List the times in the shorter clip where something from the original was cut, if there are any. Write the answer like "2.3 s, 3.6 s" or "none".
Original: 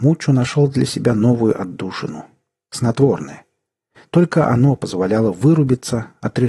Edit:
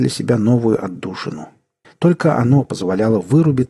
1.8 s